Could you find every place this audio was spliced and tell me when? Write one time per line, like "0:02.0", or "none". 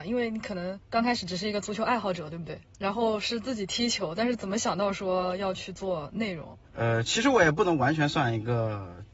0:02.6
0:06.6